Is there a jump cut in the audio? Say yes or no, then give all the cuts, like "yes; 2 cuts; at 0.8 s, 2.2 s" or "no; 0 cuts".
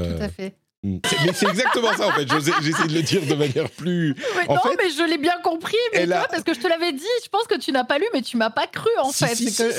yes; 1 cut; at 1.0 s